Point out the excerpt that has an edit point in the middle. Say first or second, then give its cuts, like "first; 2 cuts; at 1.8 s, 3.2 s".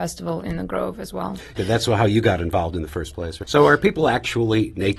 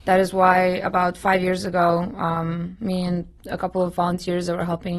first; 2 cuts; at 1.6 s, 3.4 s